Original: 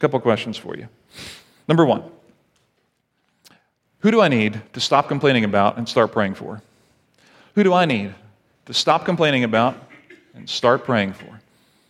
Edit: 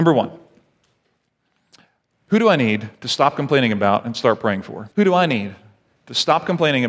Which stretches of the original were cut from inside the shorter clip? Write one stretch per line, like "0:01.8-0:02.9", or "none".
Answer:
0:06.6-0:07.5

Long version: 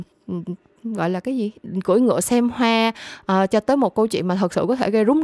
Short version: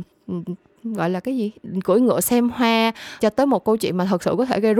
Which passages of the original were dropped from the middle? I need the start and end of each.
0:03.2-0:03.5

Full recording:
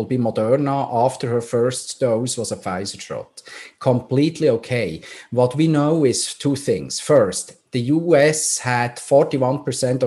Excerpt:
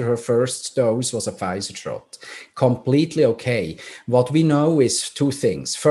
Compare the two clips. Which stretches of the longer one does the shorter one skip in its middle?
none

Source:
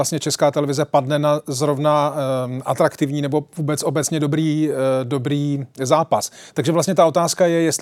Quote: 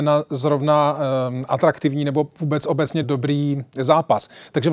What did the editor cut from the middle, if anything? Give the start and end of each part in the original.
0:04.2-0:05.0

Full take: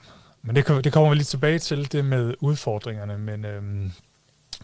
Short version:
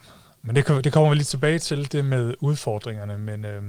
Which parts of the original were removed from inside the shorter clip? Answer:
none

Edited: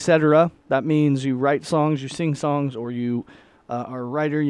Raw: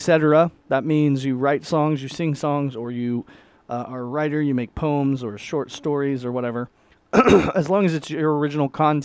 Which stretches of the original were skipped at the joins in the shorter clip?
none

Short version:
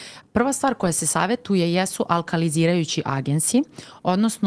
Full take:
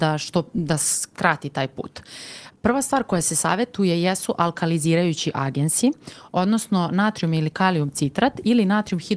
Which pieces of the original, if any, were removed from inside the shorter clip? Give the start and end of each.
none

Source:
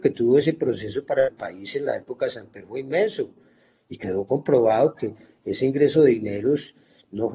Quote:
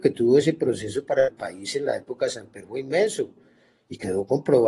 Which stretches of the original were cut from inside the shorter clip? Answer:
none

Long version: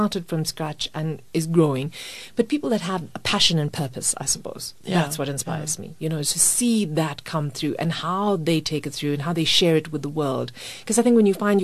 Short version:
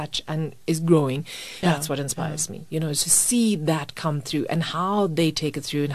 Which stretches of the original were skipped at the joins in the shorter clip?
0:02.3-0:04.9

